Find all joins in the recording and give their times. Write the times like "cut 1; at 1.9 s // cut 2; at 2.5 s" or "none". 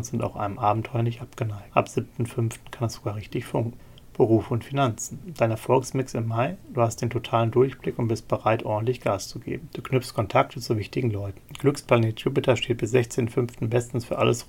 cut 1; at 9.7 s // cut 2; at 11.4 s